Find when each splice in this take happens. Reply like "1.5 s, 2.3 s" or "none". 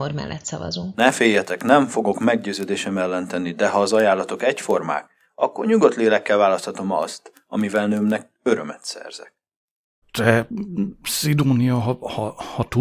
10.0 s